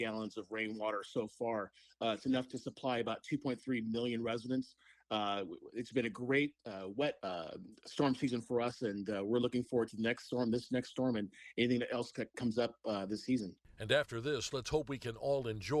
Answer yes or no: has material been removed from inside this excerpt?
yes